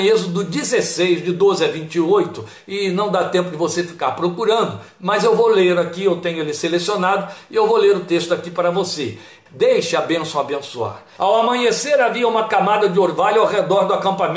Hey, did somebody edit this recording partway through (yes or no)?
yes